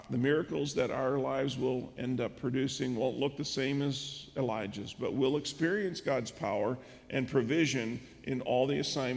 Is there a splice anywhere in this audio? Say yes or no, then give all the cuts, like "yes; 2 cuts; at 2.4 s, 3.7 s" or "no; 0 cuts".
no; 0 cuts